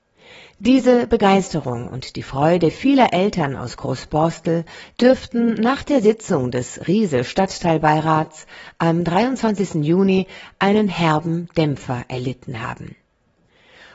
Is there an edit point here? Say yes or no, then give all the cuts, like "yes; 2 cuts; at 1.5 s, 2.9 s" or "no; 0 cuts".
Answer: no; 0 cuts